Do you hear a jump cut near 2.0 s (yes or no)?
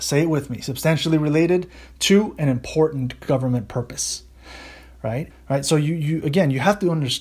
no